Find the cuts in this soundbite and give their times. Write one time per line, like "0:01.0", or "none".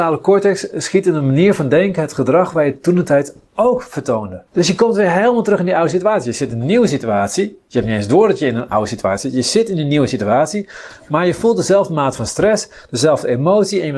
0:04.5